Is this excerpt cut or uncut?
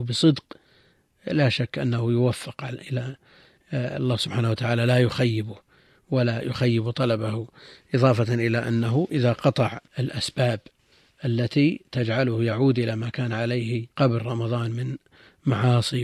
cut